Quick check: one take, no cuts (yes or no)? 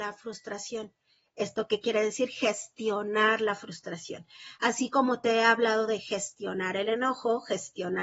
yes